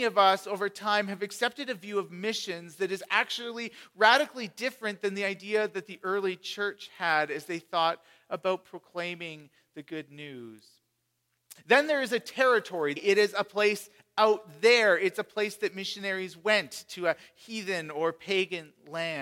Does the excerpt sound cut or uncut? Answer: cut